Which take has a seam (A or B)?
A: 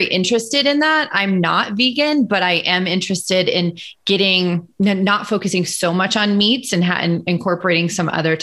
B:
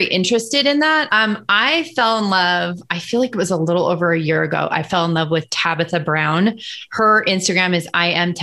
B